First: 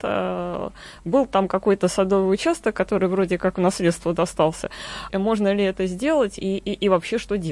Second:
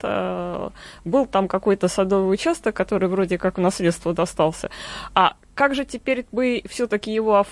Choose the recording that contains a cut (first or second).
first